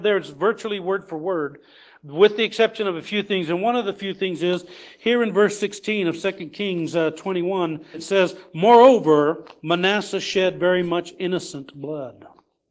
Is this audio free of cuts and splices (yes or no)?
no